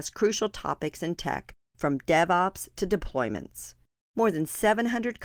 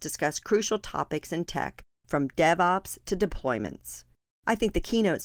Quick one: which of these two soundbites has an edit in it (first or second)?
first